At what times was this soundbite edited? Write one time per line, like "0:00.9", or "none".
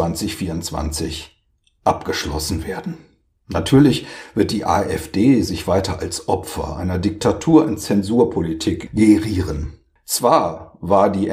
0:10.0